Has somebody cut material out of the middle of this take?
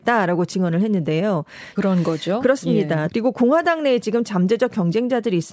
yes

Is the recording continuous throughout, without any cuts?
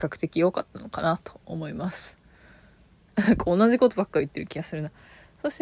no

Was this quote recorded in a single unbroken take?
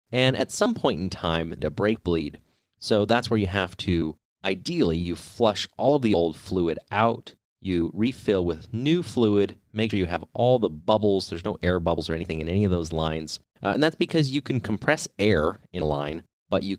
no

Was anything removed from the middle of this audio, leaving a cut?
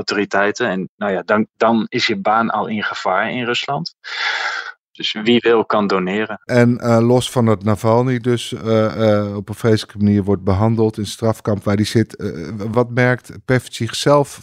yes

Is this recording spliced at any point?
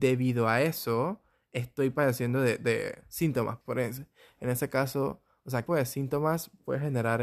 yes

